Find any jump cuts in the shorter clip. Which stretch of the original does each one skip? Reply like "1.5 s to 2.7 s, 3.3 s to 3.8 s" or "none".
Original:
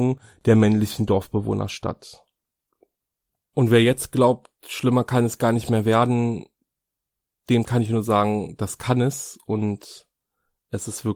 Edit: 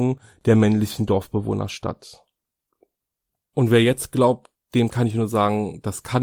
4.6 s to 7.3 s